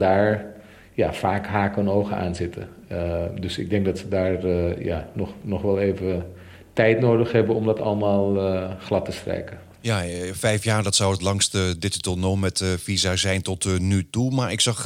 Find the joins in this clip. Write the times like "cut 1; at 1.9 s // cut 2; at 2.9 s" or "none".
none

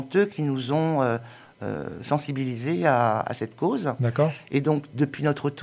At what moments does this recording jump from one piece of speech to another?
none

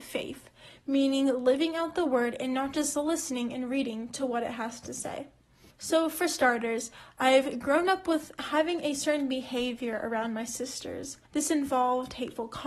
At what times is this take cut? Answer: cut 1; at 5.7 s // cut 2; at 11.2 s

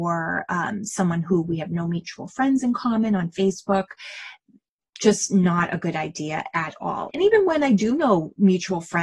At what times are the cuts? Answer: cut 1; at 7.1 s

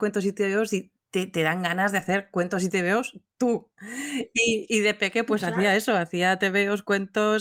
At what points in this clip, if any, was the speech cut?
none

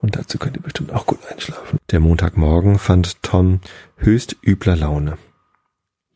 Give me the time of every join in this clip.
cut 1; at 1.8 s

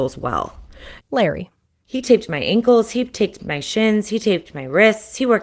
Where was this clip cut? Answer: cut 1; at 1.0 s

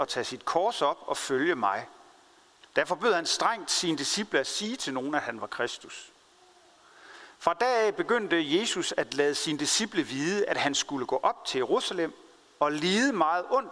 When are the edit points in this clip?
cut 1; at 2.6 s

